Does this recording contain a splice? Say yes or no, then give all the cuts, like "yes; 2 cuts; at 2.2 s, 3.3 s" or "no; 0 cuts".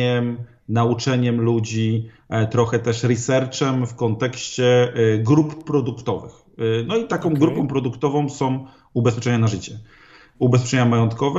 yes; 1 cut; at 10.3 s